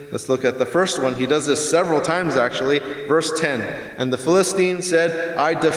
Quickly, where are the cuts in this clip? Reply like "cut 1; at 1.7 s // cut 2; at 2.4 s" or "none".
none